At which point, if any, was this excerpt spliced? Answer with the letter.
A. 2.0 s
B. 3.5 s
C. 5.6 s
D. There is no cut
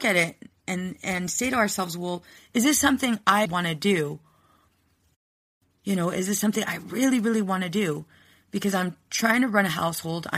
B